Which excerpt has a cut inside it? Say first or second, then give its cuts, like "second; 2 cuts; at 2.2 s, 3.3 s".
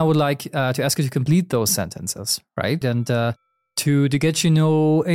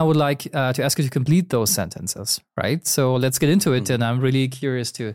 first; 1 cut; at 2.8 s